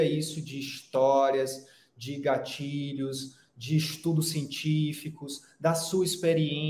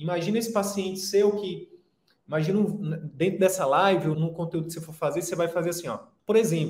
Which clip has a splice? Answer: second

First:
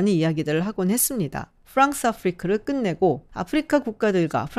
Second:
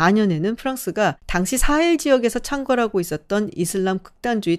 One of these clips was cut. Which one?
first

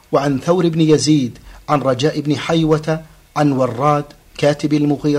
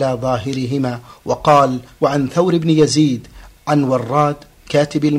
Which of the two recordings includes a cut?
second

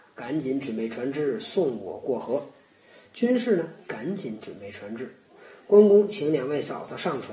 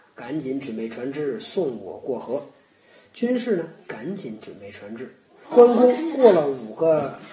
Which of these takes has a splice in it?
second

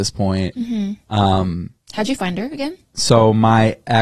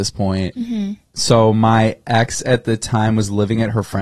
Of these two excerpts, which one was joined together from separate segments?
second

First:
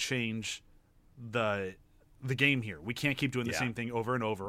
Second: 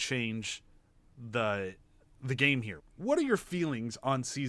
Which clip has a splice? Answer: second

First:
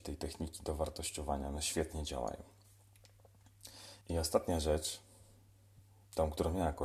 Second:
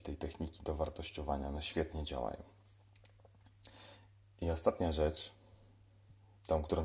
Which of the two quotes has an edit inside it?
first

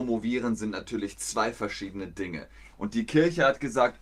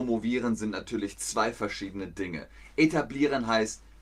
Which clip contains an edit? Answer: first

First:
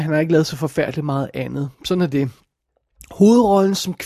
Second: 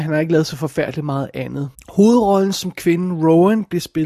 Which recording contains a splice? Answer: second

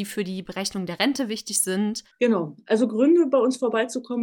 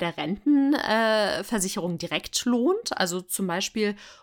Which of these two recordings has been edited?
first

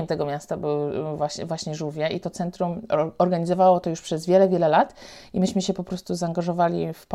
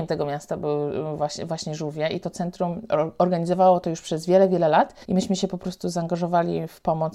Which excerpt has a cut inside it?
second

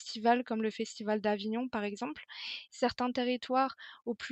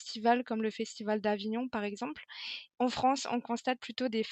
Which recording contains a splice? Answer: first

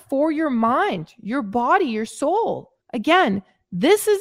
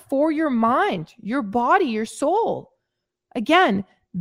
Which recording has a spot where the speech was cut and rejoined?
first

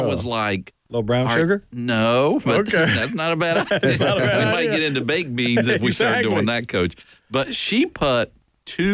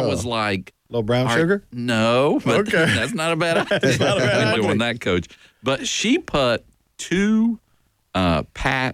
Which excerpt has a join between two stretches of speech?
second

